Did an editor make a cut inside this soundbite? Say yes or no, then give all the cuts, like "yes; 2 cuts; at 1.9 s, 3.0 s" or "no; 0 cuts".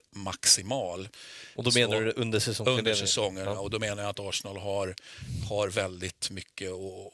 no; 0 cuts